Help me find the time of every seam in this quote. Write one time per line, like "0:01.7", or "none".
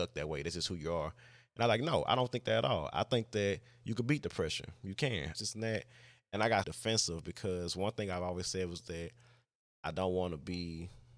0:05.3
0:06.6